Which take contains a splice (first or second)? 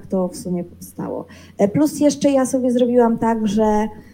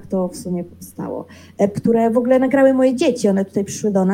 second